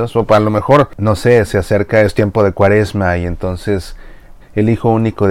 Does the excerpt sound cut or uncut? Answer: cut